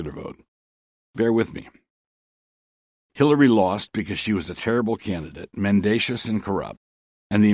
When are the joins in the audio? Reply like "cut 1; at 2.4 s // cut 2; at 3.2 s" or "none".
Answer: cut 1; at 3.1 s